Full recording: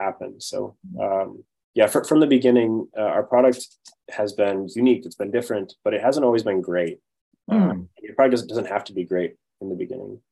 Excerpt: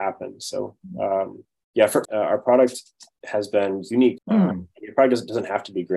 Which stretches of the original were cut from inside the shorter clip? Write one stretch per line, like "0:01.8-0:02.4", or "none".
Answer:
0:02.0-0:02.9
0:05.0-0:07.4